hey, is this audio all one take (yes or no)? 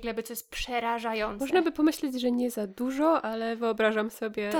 yes